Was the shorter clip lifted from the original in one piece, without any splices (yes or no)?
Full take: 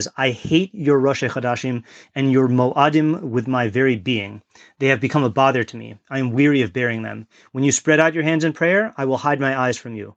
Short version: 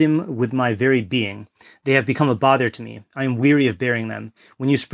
yes